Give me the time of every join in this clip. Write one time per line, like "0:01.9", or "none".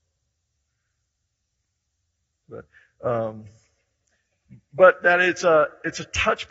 0:02.4